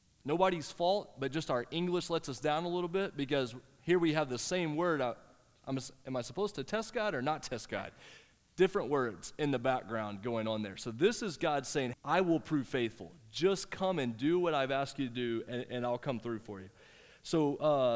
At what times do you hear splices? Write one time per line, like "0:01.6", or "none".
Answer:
0:11.9